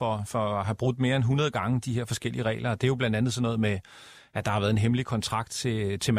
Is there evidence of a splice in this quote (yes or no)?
no